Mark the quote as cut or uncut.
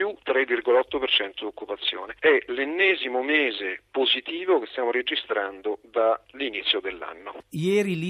uncut